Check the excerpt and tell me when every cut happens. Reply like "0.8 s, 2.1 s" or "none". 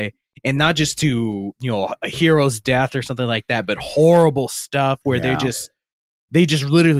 none